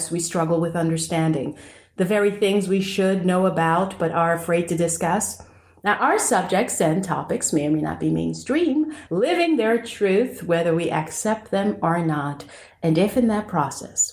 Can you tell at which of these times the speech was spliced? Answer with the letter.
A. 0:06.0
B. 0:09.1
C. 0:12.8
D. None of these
B